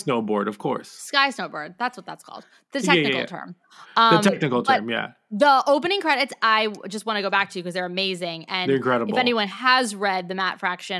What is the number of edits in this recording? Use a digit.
0